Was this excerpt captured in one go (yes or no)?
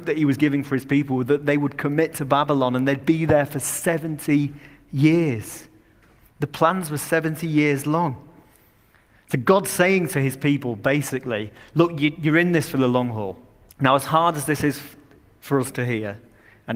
no